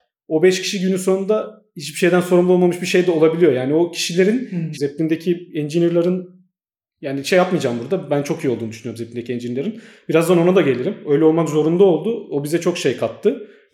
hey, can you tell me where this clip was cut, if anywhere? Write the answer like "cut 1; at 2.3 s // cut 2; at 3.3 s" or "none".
cut 1; at 4.7 s